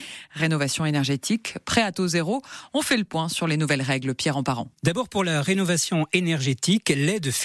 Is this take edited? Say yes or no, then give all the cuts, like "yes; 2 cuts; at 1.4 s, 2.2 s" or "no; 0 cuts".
yes; 1 cut; at 4.7 s